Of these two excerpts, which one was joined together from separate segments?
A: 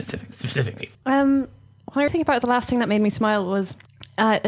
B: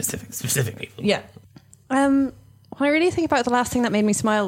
A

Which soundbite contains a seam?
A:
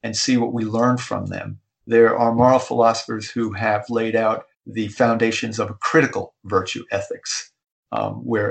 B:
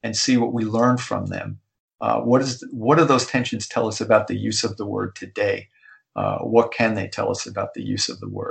A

